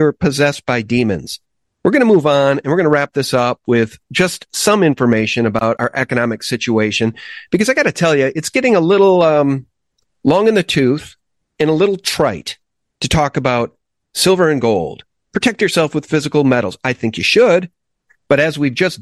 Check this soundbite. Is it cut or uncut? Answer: uncut